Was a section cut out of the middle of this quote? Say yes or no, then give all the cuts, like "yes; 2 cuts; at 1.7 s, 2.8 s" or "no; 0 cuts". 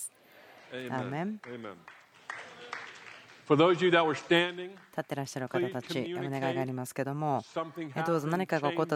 no; 0 cuts